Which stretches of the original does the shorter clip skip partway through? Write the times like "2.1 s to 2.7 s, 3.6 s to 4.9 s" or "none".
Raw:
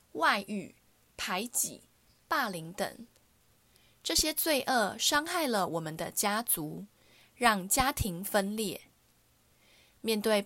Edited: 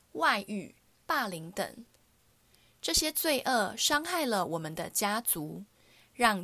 0.9 s to 2.2 s

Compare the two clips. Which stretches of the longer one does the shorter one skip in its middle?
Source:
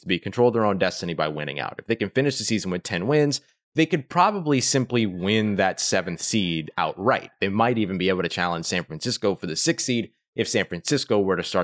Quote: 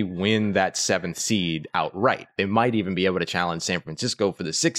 none

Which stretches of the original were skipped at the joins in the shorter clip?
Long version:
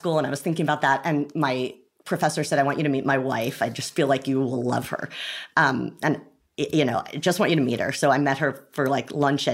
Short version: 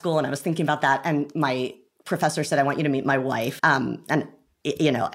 3.6 s to 5.5 s

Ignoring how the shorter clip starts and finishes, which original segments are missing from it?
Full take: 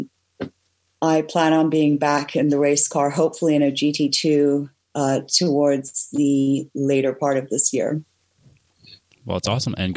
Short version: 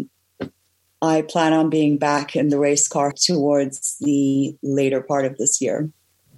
3.1 s to 5.2 s

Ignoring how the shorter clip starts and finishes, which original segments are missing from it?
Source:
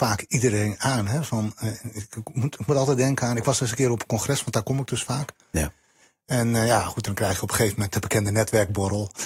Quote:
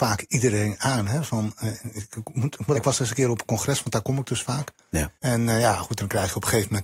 2.7 s to 3.4 s, 5.8 s to 6.2 s

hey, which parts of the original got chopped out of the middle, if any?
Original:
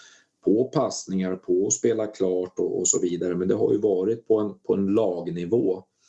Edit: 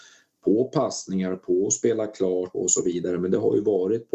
2.5 s to 2.7 s

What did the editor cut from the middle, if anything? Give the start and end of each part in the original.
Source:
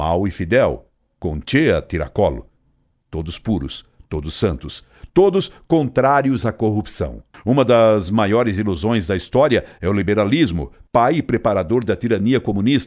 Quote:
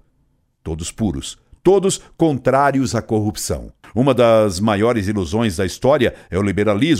4.1 s to 5.1 s

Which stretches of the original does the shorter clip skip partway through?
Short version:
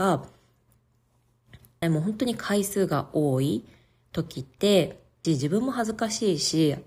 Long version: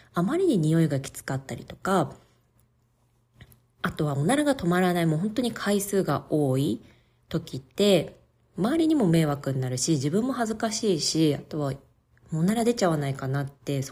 3.7 s to 5.0 s, 8.4 s to 9.9 s

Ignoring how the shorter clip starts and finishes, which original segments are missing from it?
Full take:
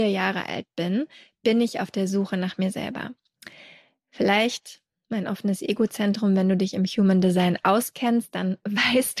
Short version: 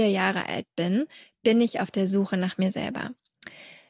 none

